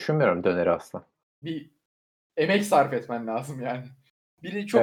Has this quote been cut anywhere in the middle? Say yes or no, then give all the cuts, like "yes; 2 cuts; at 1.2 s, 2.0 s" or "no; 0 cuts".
yes; 1 cut; at 1.4 s